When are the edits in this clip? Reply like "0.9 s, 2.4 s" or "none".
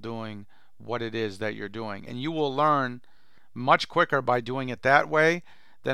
2.1 s